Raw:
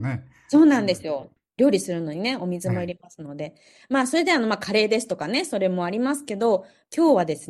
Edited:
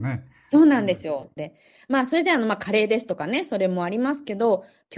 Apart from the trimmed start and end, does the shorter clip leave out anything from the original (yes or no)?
yes